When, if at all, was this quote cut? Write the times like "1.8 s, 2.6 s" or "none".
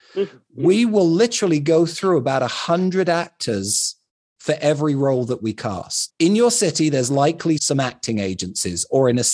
6.1 s, 7.6 s